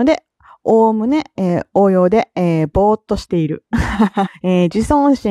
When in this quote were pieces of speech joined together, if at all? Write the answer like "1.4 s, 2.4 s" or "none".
4.3 s